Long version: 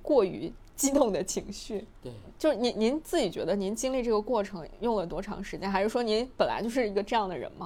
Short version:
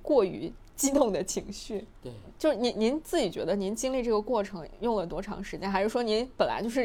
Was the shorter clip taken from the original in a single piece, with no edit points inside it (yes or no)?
yes